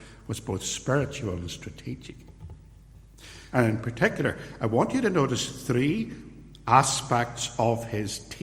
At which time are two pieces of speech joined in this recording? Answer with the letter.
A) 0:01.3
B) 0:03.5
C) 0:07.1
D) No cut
B